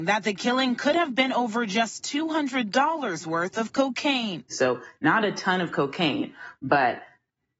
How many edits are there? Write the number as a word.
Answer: zero